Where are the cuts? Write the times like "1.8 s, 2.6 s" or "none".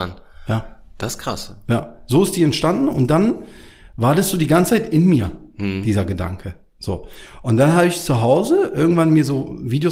none